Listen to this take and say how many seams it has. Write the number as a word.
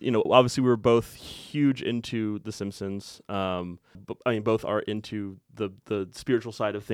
one